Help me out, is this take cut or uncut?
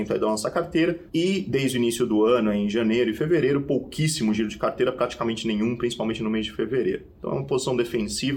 uncut